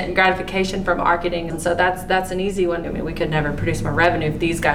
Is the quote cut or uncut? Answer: cut